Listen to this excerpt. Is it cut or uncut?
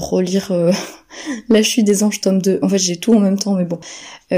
uncut